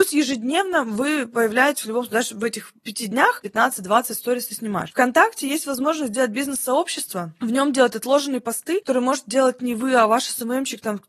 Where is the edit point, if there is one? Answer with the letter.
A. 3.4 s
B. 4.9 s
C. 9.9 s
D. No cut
A